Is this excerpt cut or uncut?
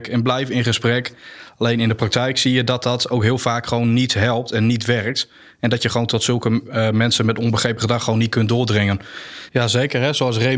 cut